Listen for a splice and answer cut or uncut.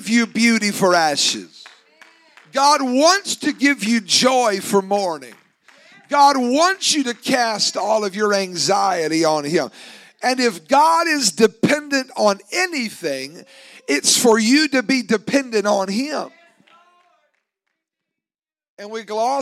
uncut